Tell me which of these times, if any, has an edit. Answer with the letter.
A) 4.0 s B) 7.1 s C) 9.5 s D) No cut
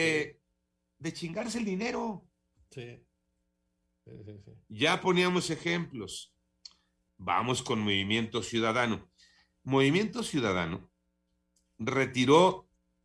B